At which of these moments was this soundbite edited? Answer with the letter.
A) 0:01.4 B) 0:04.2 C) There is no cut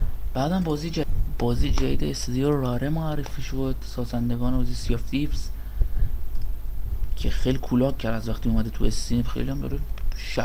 C